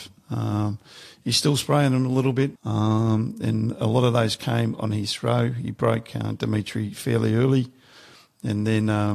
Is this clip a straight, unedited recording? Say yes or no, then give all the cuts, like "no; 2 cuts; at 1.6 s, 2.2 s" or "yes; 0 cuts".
no; 1 cut; at 2.6 s